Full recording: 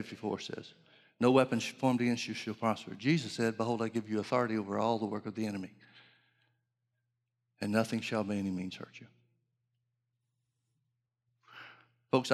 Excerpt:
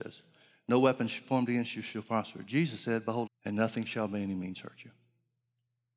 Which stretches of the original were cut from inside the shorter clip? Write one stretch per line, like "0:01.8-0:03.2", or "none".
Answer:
0:03.8-0:07.4